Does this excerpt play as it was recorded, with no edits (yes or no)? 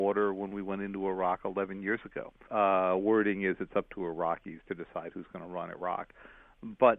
no